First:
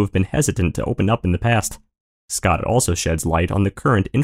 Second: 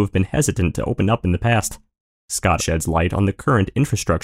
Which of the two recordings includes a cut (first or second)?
second